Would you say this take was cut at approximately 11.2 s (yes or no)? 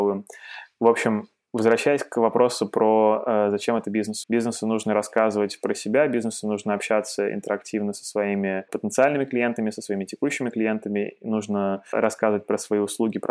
no